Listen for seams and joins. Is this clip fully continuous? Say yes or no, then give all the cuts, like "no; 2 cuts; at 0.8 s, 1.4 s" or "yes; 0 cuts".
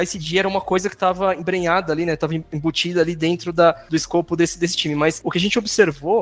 yes; 0 cuts